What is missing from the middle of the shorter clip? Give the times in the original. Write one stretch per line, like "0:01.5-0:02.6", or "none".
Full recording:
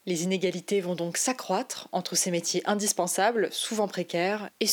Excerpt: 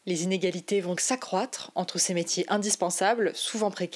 0:01.0-0:01.1